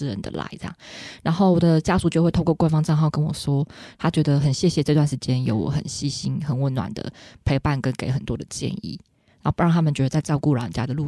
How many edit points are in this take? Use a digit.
0